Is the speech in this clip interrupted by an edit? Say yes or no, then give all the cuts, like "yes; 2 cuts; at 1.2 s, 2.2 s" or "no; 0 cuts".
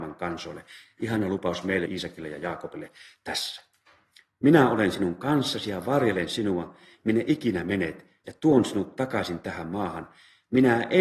yes; 1 cut; at 1.9 s